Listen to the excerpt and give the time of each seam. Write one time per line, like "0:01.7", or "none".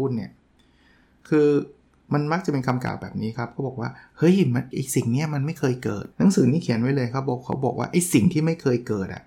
0:04.7
0:06.1